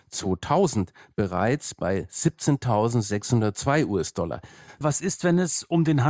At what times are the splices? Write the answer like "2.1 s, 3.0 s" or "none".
4.8 s